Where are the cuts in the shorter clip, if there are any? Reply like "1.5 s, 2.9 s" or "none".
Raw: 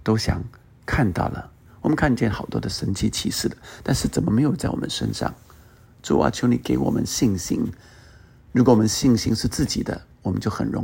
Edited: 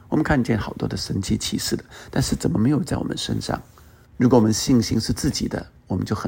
4.0 s